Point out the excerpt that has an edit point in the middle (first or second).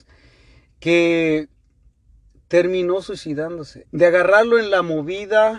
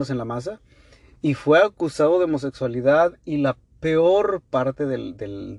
first